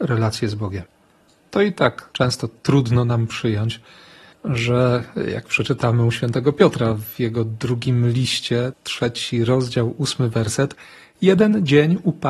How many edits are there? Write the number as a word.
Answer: zero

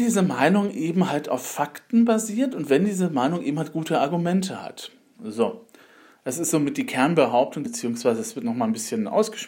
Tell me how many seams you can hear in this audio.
two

